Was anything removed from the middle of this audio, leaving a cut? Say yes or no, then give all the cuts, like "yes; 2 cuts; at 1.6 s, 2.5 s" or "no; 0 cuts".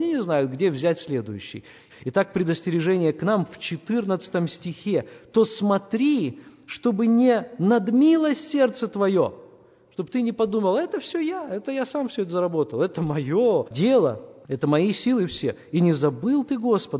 yes; 1 cut; at 1.9 s